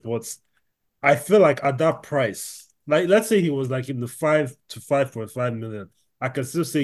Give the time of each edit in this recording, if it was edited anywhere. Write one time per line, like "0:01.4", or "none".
none